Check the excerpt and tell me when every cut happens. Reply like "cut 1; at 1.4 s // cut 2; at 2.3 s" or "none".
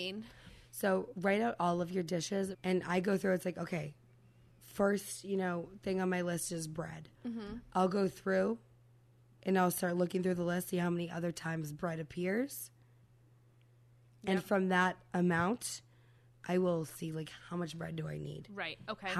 cut 1; at 2.5 s